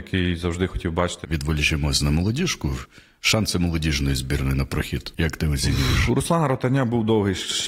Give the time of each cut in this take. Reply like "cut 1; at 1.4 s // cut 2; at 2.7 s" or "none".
cut 1; at 1.2 s